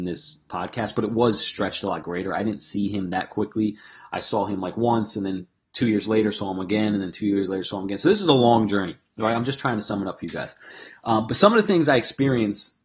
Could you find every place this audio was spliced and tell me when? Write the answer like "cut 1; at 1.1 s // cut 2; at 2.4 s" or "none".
none

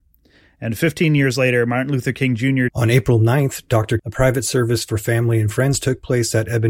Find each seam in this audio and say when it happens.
cut 1; at 2.7 s // cut 2; at 4.0 s

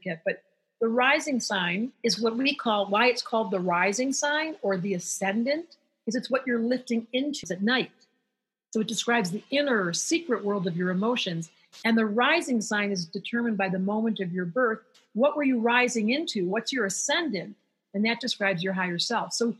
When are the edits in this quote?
cut 1; at 7.4 s

